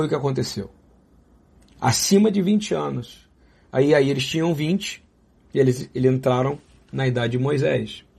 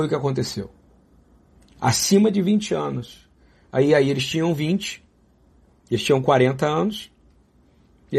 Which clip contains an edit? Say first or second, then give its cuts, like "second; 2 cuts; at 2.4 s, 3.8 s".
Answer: first; 1 cut; at 5.4 s